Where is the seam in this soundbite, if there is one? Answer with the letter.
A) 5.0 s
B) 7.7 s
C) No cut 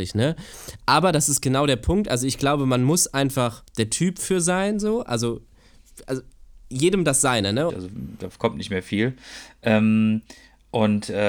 B